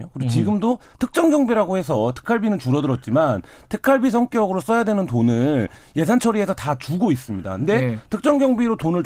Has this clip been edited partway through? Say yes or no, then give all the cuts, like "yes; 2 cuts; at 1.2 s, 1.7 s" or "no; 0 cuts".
no; 0 cuts